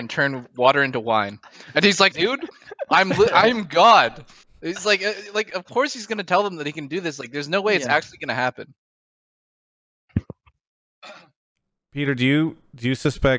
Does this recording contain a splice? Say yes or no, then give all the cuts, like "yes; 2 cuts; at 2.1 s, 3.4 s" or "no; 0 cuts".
yes; 1 cut; at 2.1 s